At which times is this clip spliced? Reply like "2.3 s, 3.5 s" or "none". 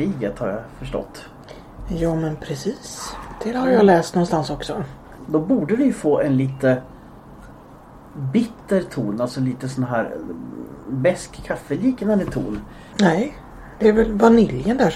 5.2 s, 12.9 s